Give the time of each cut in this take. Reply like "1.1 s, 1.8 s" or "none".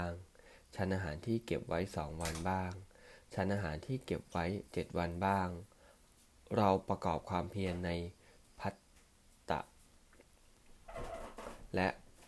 4.7 s